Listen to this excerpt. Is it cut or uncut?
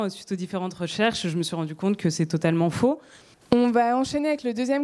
cut